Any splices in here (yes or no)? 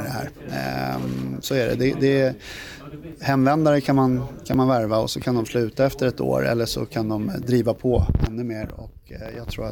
no